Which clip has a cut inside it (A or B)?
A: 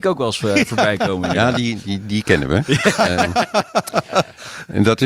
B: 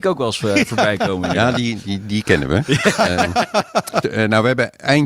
B